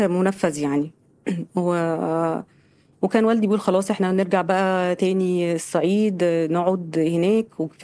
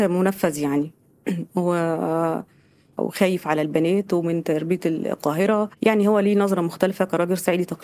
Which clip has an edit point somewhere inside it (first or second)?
second